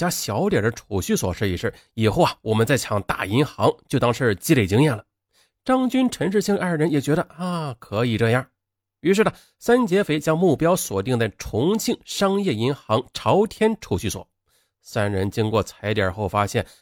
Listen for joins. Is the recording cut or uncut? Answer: uncut